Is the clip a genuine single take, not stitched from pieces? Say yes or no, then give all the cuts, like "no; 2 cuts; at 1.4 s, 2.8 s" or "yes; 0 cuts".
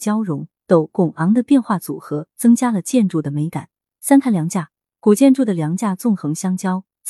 yes; 0 cuts